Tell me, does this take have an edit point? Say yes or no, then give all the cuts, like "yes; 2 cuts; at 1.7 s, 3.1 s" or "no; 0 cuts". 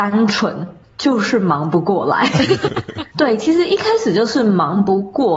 yes; 1 cut; at 2.7 s